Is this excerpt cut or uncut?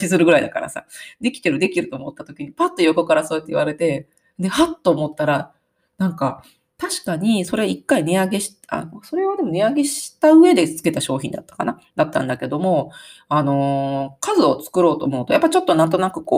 uncut